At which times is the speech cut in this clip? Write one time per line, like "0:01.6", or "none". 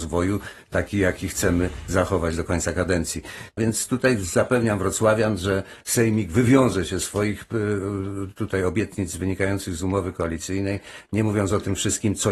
0:03.6